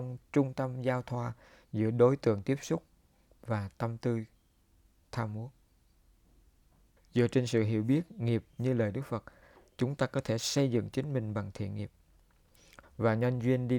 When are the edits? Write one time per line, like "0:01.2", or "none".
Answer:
0:07.0
0:12.8